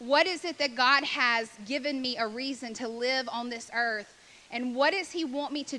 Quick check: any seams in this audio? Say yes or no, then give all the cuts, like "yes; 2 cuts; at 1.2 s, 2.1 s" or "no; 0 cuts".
no; 0 cuts